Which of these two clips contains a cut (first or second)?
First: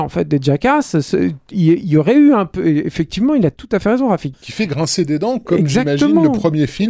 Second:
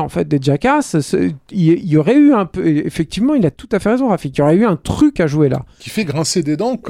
first